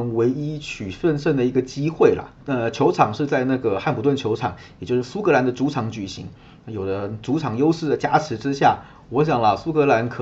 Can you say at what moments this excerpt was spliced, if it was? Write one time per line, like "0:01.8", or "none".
0:02.4